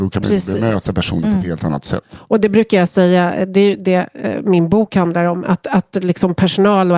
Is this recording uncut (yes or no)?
yes